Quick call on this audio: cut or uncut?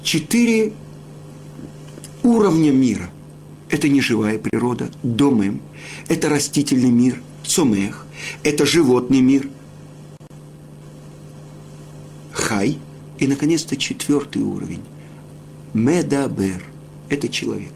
uncut